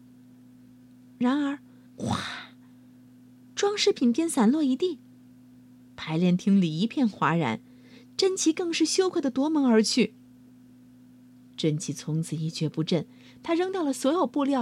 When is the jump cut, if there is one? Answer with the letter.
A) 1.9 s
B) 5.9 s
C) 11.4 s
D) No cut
A